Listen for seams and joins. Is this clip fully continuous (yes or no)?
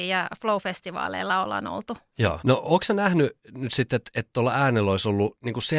no